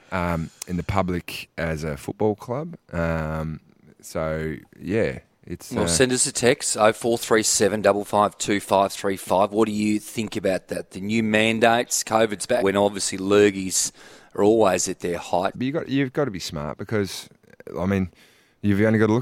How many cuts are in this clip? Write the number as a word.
two